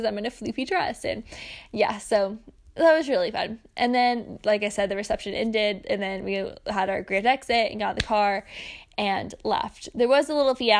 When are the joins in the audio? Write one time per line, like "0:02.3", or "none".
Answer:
none